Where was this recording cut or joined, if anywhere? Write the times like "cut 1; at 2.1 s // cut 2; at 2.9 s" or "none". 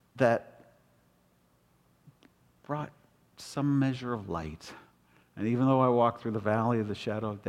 cut 1; at 5.2 s